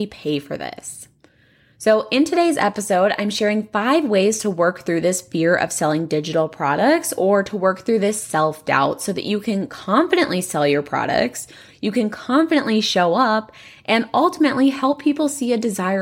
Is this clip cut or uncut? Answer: uncut